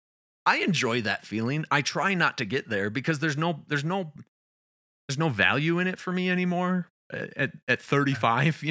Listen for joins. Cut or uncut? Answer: uncut